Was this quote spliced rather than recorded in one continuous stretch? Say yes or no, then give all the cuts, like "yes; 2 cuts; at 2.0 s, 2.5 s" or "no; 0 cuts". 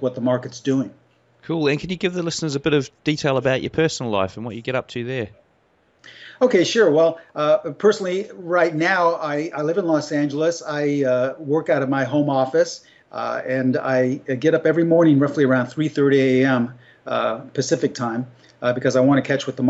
no; 0 cuts